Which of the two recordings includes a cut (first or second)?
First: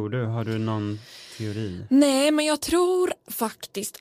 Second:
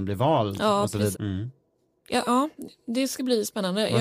second